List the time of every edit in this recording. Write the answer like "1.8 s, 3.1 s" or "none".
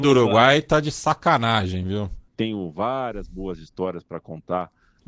2.3 s